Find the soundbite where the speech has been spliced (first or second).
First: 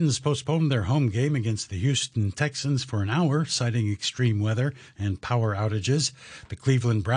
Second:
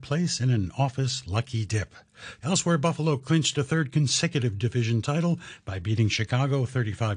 second